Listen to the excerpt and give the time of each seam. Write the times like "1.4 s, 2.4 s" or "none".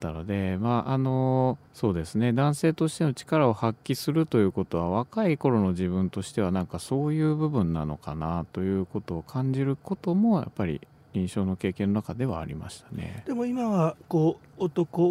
1.7 s